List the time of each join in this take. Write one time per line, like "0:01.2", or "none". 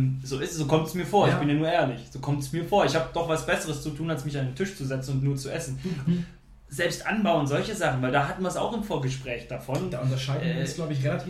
0:06.1